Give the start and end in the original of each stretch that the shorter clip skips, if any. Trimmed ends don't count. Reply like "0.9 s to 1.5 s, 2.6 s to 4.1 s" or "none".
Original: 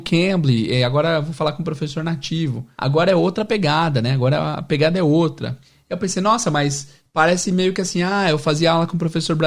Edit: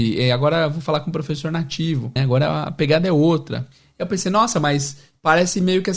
2.7 s to 4.1 s